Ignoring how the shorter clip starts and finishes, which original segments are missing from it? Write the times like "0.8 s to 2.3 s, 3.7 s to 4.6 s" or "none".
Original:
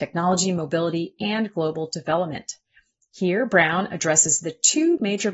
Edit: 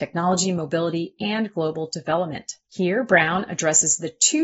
2.6 s to 3.1 s